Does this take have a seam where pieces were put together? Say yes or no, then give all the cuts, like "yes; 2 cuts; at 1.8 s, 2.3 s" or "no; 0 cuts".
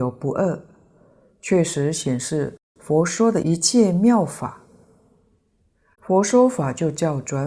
yes; 1 cut; at 5.9 s